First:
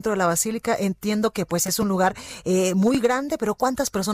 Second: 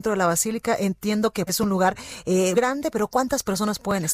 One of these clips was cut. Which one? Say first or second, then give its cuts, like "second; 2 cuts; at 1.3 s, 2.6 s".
second; 2 cuts; at 1.5 s, 2.5 s